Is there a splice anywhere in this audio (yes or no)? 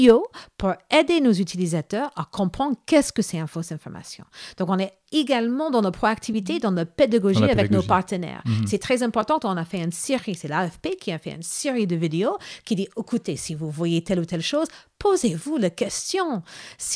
no